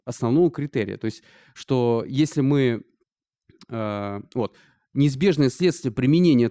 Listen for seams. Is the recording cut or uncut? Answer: uncut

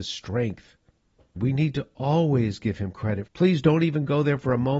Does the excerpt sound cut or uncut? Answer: cut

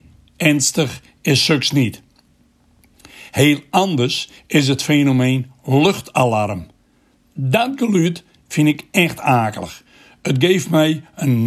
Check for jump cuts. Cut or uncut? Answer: uncut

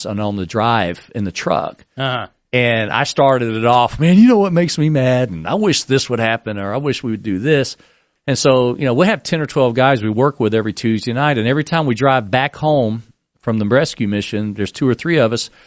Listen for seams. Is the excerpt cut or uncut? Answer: cut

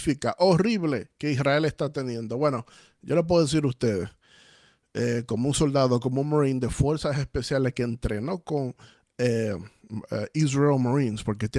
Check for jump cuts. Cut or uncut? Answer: uncut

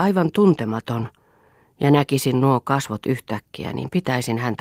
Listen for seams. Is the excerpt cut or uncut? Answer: uncut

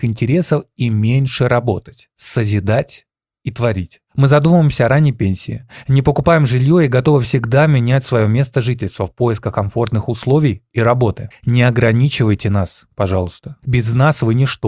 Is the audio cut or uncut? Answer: cut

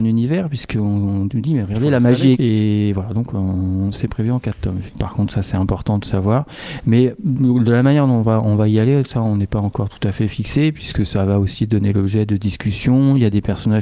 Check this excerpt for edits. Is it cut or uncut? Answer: cut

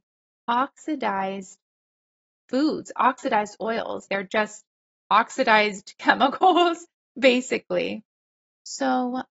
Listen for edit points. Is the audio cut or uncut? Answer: cut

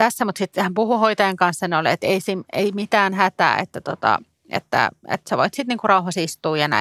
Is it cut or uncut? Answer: uncut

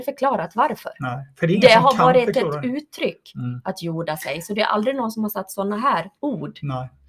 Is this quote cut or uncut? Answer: cut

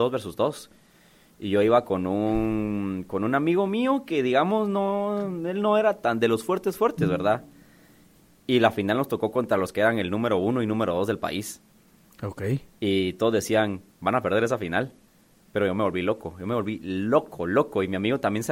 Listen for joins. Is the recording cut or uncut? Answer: uncut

